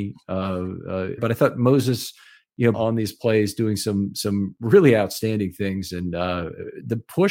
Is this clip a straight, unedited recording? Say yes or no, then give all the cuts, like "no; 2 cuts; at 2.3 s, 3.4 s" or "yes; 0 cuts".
no; 2 cuts; at 1.2 s, 2.7 s